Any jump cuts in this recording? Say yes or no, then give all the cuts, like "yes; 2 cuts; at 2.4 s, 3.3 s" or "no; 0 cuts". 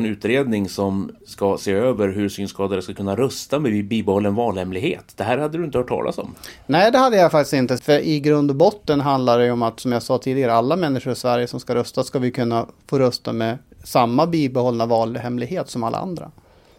yes; 1 cut; at 7.8 s